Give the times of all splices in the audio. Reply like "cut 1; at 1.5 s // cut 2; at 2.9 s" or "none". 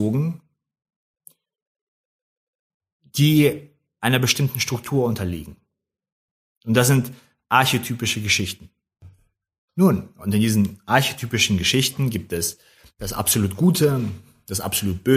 none

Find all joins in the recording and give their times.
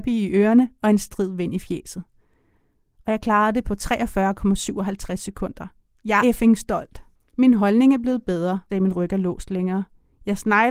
cut 1; at 6.2 s // cut 2; at 8.7 s

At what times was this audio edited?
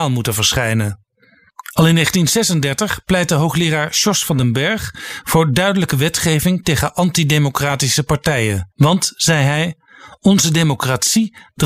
cut 1; at 8.7 s

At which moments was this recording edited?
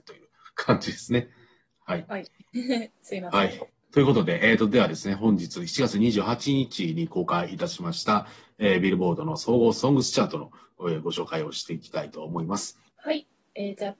cut 1; at 12.9 s

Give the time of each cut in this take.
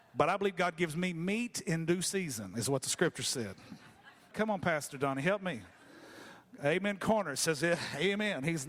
cut 1; at 4.3 s

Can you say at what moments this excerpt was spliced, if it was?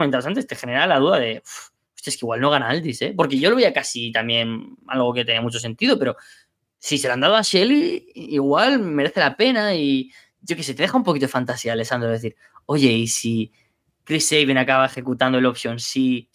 none

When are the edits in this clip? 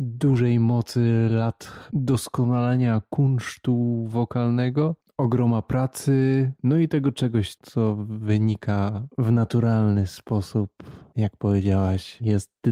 cut 1; at 7.6 s

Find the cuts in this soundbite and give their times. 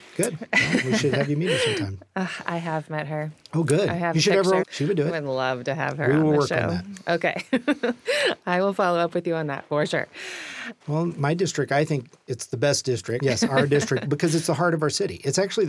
cut 1; at 4.6 s // cut 2; at 10.8 s // cut 3; at 13.2 s

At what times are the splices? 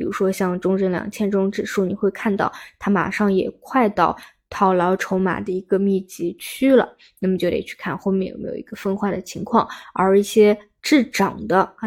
none

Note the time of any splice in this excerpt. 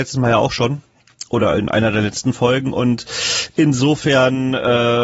none

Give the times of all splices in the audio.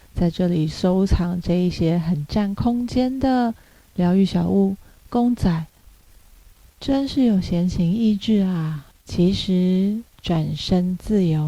cut 1; at 8.9 s // cut 2; at 10.1 s

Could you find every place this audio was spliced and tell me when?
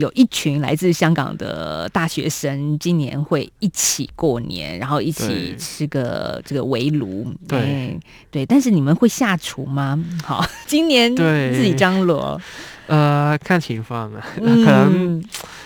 none

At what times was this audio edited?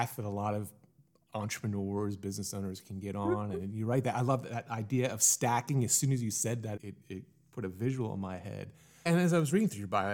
cut 1; at 6.8 s // cut 2; at 9.1 s

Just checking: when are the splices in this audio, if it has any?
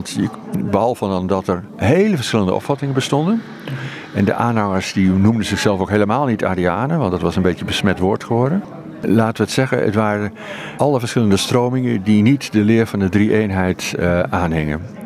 none

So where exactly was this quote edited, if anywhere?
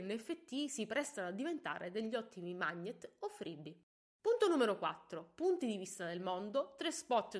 none

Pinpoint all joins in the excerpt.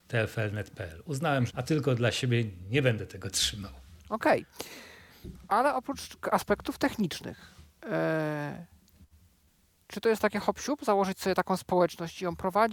cut 1; at 1.5 s

